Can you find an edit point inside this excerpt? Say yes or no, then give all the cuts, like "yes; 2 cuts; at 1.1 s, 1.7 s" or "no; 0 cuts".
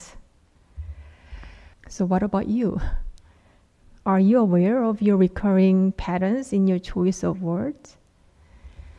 yes; 1 cut; at 1.7 s